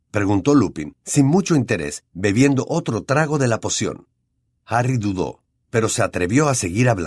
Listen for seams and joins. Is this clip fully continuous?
no; 1 cut; at 4.5 s

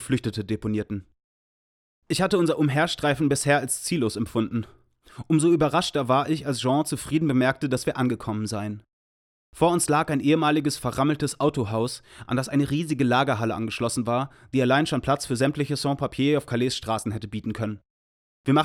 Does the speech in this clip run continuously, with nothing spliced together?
yes; 0 cuts

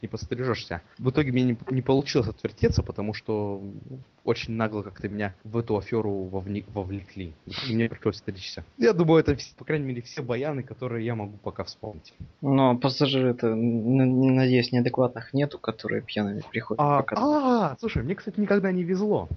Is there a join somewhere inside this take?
no; 0 cuts

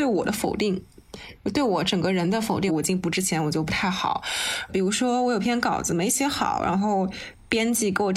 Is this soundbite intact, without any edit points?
no; 2 cuts; at 2.7 s, 4.7 s

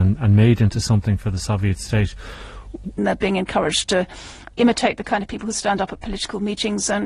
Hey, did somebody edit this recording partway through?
yes; 1 cut; at 3.0 s

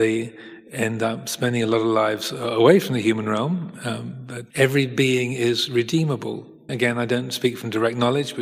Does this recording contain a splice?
yes; 2 cuts; at 4.5 s, 6.7 s

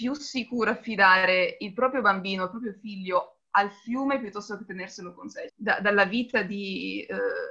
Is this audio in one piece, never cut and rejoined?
no; 1 cut; at 5.5 s

